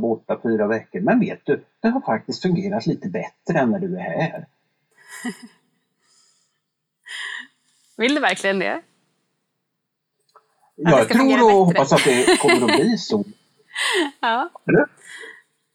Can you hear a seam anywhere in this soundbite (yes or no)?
no